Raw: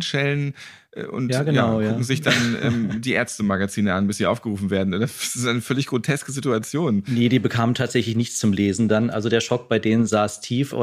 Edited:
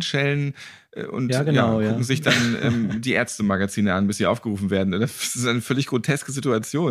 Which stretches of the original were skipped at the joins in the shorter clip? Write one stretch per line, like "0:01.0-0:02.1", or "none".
none

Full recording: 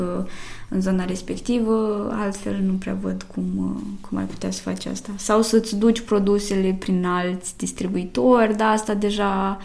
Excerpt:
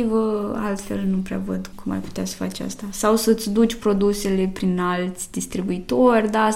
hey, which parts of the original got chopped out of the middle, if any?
0:03.3-0:04.0

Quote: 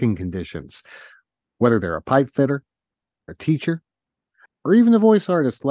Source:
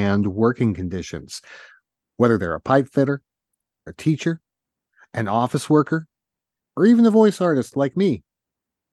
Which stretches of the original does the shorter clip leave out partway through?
0:05.0-0:06.6

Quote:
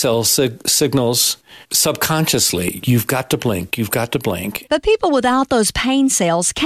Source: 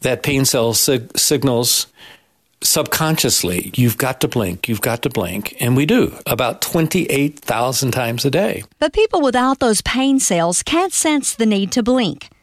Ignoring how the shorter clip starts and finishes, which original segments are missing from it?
0:02.1-0:02.5
0:05.5-0:08.7

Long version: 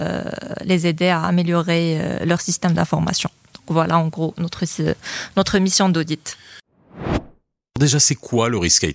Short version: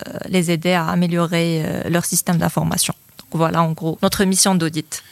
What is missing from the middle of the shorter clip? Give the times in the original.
0:04.3-0:05.3

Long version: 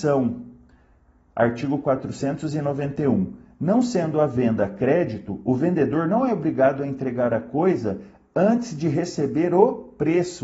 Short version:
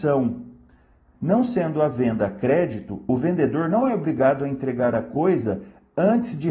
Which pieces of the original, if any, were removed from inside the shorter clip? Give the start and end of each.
0:01.1-0:03.5

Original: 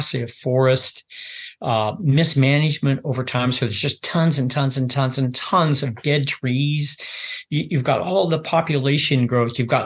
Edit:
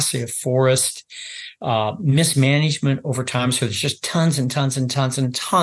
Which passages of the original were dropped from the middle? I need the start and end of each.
none

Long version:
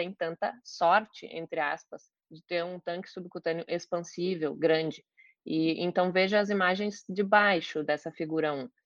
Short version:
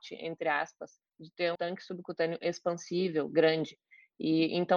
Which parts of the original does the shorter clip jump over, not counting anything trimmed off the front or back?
0:02.7-0:02.8

